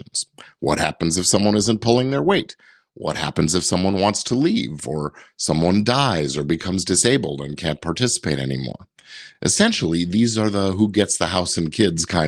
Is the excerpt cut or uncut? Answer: uncut